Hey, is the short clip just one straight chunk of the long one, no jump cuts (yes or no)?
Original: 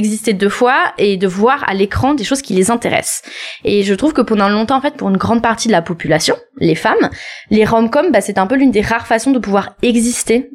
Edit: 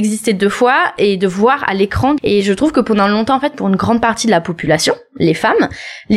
no